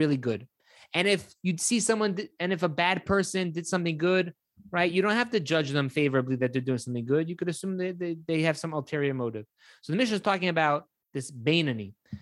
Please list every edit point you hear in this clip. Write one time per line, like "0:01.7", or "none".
none